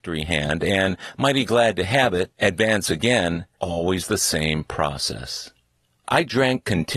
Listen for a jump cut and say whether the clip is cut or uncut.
cut